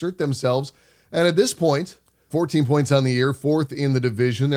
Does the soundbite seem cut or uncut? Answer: cut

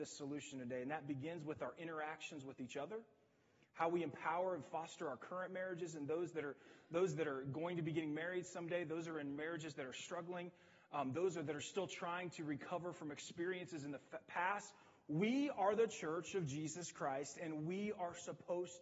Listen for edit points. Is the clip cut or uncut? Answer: uncut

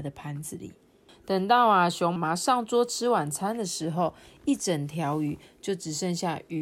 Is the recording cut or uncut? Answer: cut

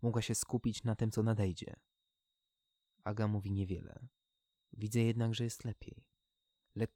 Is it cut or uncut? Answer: cut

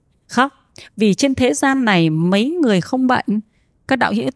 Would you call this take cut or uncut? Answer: uncut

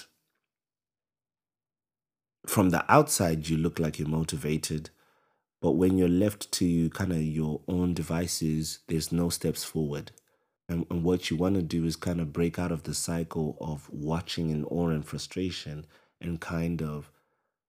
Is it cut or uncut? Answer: cut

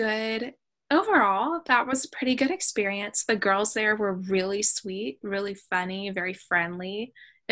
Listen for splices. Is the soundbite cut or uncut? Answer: uncut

